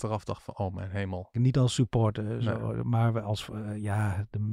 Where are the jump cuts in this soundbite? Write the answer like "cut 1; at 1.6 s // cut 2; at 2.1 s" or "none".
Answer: cut 1; at 1.3 s